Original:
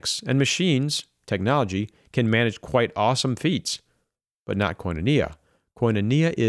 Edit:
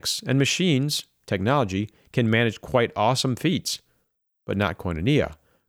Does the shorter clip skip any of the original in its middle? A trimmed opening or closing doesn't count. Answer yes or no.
no